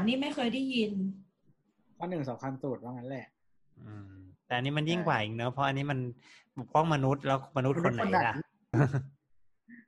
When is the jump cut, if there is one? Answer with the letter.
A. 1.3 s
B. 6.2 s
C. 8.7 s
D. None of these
C